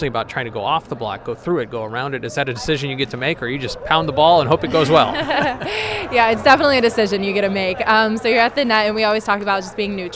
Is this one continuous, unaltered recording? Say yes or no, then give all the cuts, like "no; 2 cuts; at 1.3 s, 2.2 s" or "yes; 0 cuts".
yes; 0 cuts